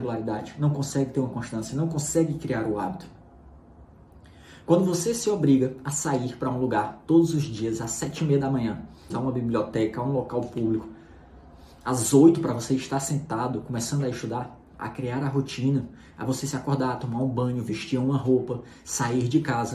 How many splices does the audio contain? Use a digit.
2